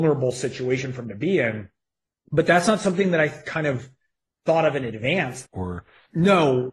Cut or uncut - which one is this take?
cut